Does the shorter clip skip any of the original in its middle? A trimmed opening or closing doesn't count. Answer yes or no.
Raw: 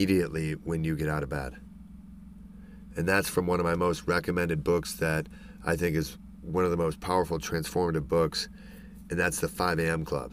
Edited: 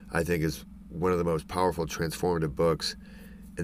no